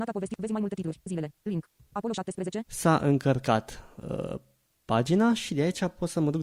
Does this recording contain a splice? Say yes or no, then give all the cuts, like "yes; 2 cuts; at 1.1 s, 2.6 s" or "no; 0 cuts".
yes; 1 cut; at 2.7 s